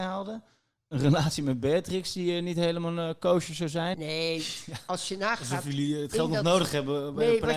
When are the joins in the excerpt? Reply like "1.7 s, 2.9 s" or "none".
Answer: 3.9 s